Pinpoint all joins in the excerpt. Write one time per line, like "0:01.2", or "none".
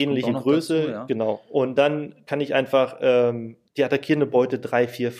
0:03.7